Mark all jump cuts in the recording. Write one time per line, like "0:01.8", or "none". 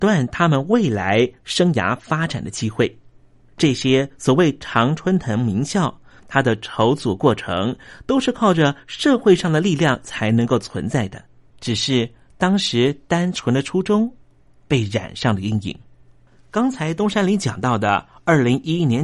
0:03.5
0:06.2
0:11.5